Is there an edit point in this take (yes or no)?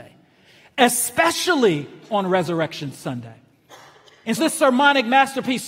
yes